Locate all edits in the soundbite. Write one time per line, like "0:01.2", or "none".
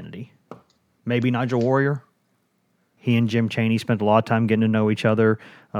0:03.0